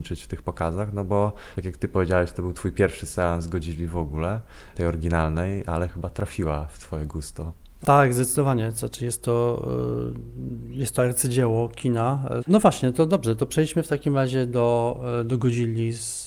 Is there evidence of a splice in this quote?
yes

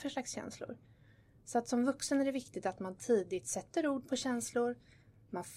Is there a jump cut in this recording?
no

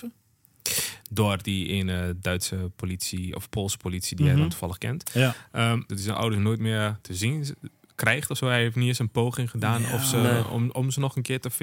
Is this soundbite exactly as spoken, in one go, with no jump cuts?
no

